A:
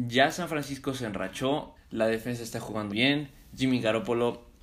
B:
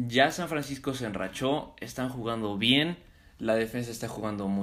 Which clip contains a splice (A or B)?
A